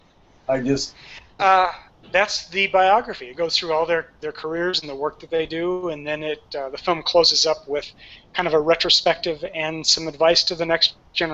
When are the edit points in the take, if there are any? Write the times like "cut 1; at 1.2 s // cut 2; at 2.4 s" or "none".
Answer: cut 1; at 1.4 s